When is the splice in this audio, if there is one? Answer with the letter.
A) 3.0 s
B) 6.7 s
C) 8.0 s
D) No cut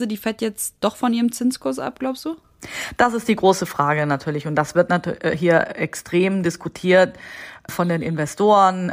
D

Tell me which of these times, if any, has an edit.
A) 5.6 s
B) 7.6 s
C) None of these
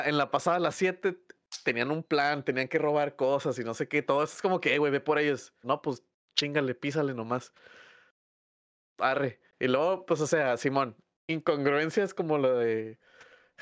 A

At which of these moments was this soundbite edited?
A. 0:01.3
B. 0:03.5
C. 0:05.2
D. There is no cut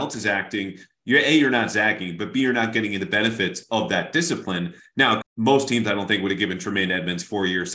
C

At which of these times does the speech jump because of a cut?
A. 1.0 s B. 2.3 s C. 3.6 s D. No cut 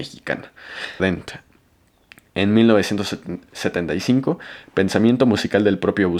A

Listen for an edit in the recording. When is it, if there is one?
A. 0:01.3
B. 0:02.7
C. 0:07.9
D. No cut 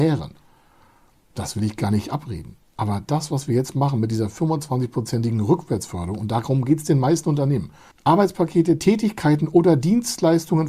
C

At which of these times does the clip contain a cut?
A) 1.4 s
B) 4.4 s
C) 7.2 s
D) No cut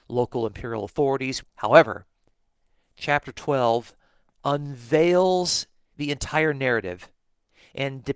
A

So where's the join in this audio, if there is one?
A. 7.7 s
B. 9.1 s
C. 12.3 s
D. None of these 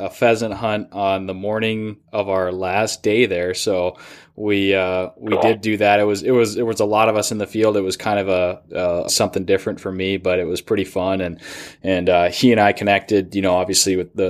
B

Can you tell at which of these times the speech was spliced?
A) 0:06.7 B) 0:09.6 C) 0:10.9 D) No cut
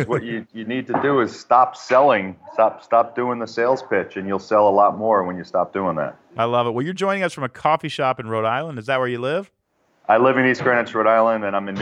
D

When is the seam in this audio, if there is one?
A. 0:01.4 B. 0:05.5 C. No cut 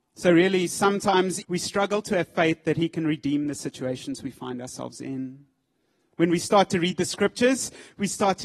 A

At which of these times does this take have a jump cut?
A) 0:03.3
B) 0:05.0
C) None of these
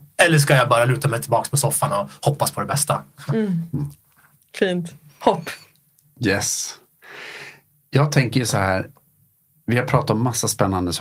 C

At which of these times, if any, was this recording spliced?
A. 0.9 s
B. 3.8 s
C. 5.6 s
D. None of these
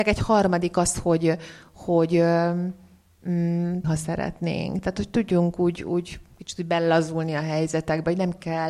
B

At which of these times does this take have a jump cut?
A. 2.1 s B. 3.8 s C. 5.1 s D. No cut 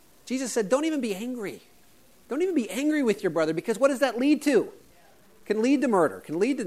D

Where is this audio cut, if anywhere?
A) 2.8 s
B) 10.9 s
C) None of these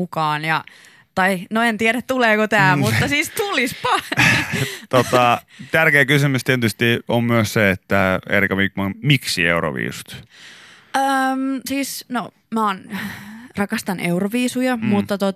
C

